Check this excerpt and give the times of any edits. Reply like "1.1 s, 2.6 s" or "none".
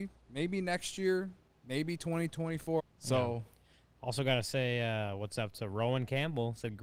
2.8 s